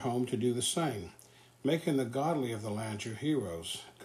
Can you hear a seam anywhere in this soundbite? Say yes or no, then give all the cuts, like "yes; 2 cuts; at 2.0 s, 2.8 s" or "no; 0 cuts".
no; 0 cuts